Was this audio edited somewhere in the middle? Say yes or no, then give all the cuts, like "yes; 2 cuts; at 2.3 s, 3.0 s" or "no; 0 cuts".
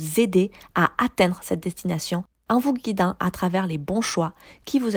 no; 0 cuts